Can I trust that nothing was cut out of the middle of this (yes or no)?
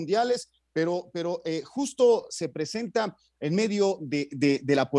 yes